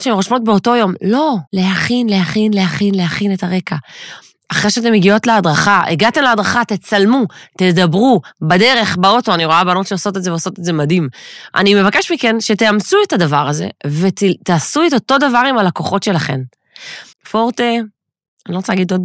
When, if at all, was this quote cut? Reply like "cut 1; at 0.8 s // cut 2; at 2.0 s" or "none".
cut 1; at 1.5 s // cut 2; at 11.5 s // cut 3; at 17.1 s